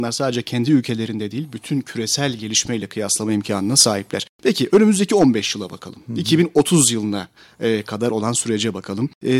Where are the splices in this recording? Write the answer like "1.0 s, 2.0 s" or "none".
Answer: none